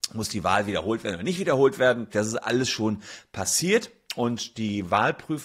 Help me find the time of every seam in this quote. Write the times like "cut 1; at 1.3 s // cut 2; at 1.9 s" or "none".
cut 1; at 2.1 s